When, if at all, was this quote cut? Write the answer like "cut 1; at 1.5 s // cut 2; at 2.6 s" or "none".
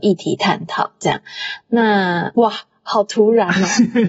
none